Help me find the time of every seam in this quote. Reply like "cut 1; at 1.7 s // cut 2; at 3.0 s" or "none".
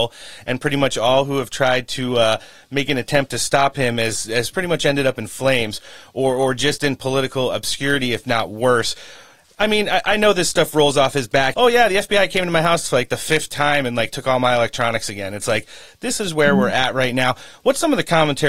cut 1; at 11.5 s